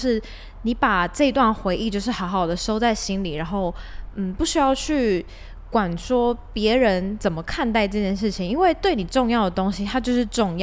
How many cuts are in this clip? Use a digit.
0